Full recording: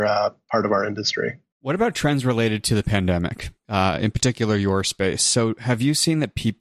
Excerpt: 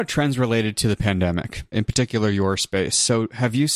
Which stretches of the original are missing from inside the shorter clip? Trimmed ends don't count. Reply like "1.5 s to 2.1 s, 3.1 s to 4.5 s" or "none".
3.6 s to 4.0 s